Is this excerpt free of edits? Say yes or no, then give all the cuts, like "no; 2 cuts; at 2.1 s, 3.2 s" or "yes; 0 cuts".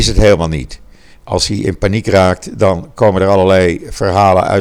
no; 1 cut; at 1.1 s